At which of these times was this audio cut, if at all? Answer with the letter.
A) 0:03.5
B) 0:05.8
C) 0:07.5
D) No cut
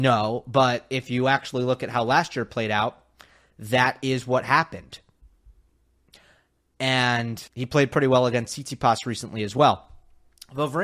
C